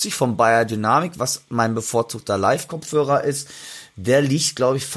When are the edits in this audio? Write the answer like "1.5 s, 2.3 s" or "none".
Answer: none

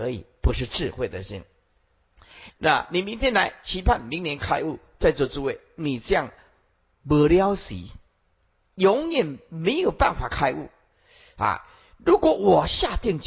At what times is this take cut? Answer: 2.5 s

